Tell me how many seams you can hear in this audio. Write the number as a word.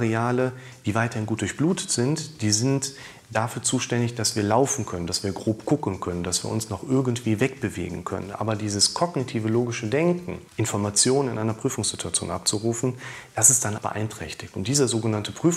two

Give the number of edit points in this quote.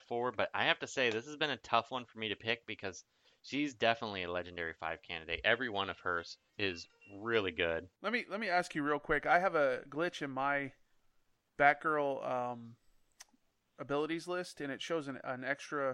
one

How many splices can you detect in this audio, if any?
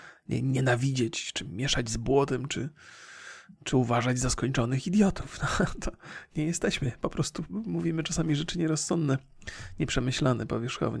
zero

